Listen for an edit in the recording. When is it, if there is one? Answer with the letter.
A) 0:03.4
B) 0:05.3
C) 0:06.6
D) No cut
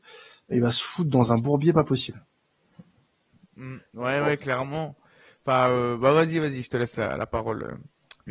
D